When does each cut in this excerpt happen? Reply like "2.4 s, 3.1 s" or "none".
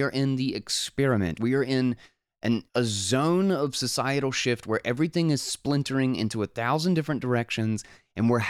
1.3 s, 2.7 s